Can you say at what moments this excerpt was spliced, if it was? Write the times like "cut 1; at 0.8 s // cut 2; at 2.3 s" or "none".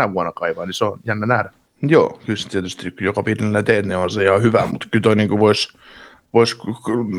cut 1; at 1.6 s // cut 2; at 4.7 s